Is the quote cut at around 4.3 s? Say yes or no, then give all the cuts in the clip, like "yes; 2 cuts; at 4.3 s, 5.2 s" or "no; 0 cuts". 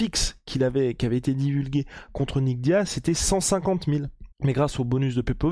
yes; 1 cut; at 4.3 s